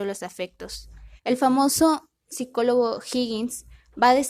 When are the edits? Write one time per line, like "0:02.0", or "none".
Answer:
0:01.2